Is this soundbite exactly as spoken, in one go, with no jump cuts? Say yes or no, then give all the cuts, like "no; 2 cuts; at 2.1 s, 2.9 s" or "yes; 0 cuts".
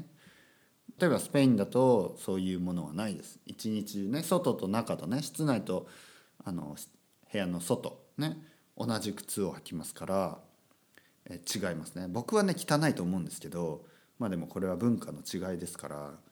no; 1 cut; at 1.0 s